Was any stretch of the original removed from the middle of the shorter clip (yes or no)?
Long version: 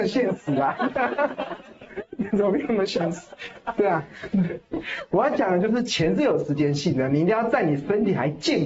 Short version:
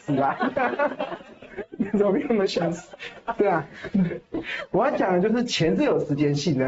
no